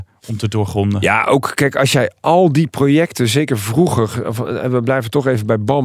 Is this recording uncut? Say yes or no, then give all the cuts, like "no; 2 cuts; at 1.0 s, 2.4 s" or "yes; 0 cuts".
yes; 0 cuts